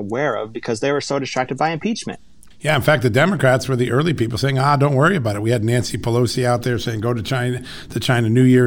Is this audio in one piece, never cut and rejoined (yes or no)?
no